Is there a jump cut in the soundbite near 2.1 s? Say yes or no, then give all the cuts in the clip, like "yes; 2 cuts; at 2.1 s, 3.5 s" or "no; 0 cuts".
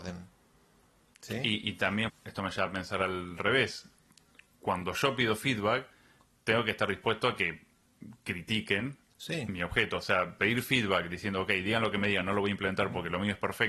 yes; 1 cut; at 2.1 s